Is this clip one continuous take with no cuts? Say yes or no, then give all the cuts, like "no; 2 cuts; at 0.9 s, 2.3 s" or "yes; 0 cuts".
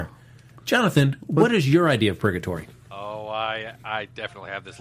yes; 0 cuts